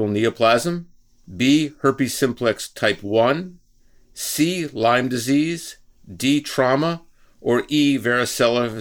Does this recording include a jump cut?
no; 0 cuts

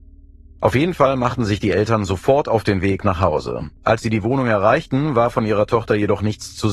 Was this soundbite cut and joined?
yes; 1 cut; at 3.8 s

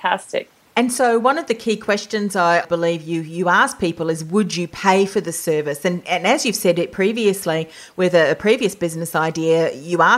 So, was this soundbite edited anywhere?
no; 0 cuts

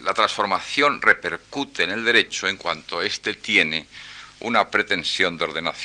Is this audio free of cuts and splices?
yes; 0 cuts

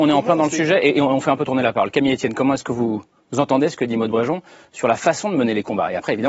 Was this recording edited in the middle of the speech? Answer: no; 0 cuts

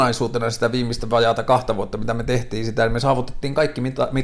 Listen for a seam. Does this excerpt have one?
no; 0 cuts

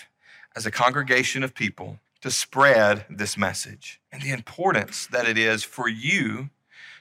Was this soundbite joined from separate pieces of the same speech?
yes; 2 cuts; at 2.1 s, 4.1 s

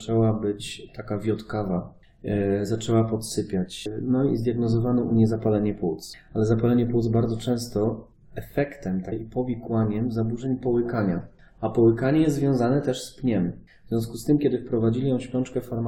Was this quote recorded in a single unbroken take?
yes; 0 cuts

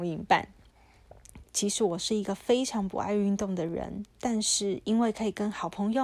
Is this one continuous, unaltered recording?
no; 2 cuts; at 1.4 s, 4.1 s

